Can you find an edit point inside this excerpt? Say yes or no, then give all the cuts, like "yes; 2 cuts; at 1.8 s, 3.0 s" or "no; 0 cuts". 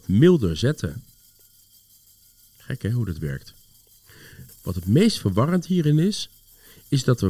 yes; 1 cut; at 4.5 s